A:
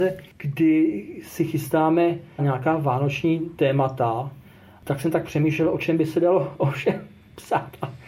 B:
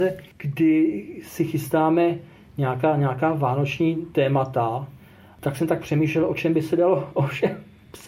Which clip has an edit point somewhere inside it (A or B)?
A